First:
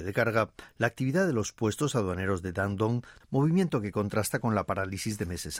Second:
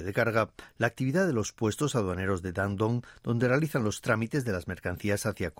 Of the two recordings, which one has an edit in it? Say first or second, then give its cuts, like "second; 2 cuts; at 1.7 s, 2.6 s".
first; 1 cut; at 3.2 s